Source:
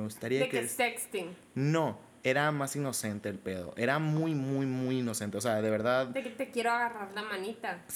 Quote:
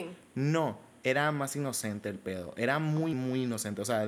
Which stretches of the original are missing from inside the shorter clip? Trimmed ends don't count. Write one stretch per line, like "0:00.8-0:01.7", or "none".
0:04.3-0:04.7